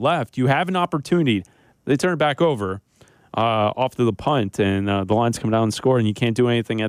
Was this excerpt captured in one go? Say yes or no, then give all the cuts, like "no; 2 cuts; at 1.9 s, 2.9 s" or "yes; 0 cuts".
no; 1 cut; at 1.7 s